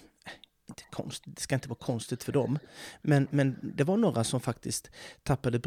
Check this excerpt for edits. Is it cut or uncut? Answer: uncut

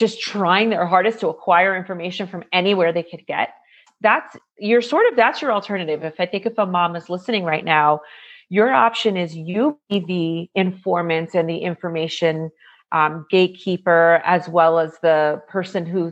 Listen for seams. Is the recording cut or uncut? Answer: uncut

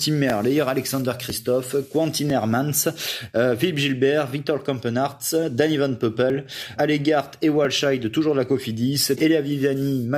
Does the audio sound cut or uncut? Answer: cut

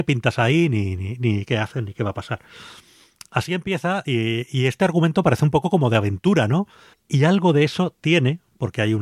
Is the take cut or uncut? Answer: cut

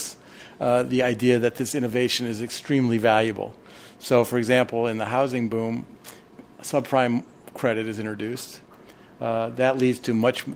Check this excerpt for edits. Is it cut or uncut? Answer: uncut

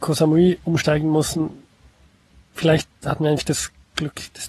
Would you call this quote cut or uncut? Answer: uncut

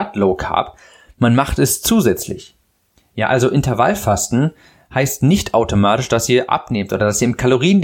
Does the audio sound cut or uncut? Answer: uncut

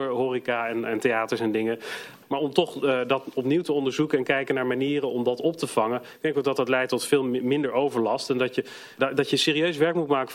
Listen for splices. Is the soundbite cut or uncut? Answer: uncut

